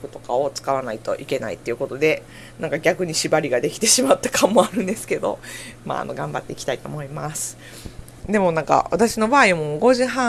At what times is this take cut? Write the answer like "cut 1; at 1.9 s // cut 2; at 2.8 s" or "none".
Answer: cut 1; at 8.2 s